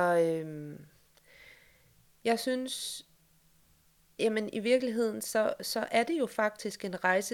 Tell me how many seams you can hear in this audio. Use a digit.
0